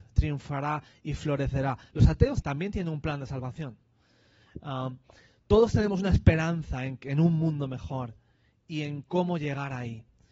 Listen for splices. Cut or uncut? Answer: cut